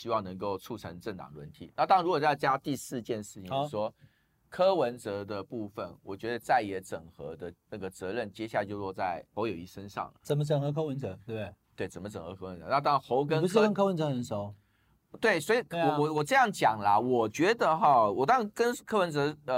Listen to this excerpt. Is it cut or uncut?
uncut